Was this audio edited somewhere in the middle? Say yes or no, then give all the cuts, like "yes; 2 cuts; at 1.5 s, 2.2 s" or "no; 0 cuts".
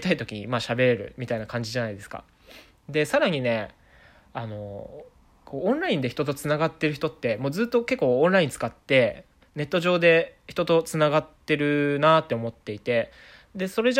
no; 0 cuts